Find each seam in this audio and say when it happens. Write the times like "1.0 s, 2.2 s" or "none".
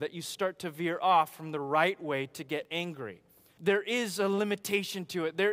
3.6 s